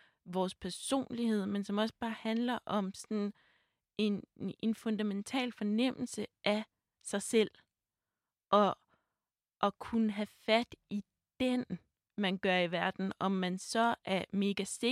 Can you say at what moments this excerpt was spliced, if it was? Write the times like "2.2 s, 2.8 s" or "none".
12.1 s